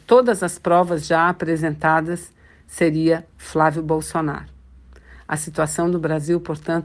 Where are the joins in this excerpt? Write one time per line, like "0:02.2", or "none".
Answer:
none

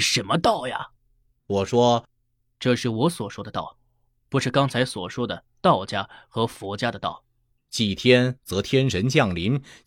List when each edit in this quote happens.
0:01.0
0:07.6

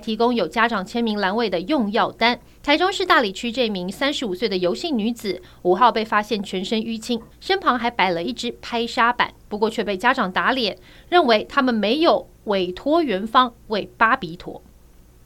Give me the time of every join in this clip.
0:02.6
0:07.3
0:09.4

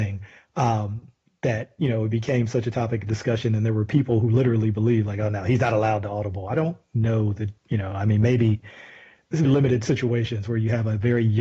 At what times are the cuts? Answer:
0:07.6
0:09.4

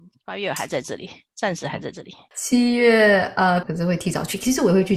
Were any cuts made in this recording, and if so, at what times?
0:02.3
0:03.6

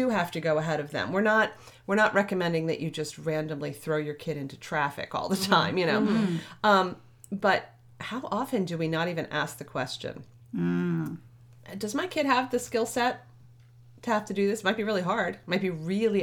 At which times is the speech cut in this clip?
none

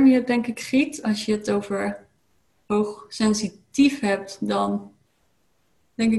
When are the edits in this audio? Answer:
none

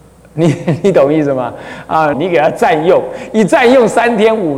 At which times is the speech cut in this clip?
0:02.1

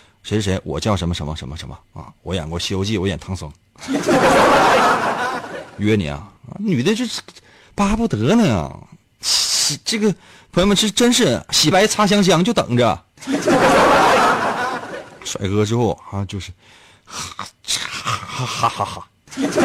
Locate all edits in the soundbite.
0:11.7
0:18.7

